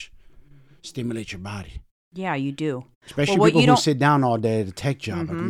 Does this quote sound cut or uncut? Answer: uncut